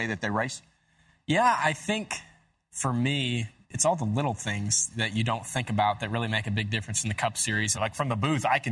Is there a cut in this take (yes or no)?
yes